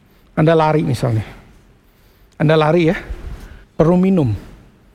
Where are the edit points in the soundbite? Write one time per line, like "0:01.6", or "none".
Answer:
0:03.6